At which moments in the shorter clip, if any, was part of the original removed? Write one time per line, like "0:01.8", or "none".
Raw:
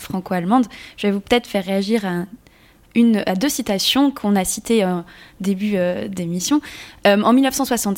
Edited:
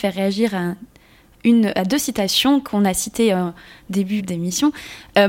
0:04.2